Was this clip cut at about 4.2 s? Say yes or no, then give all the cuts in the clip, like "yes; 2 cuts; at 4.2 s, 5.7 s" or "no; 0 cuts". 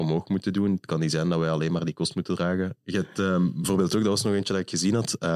no; 1 cut; at 2.8 s